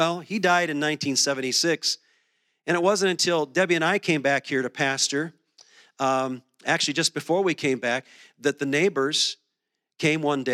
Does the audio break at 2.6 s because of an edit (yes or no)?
no